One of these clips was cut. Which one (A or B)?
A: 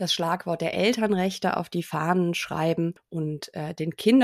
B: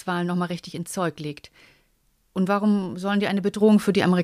B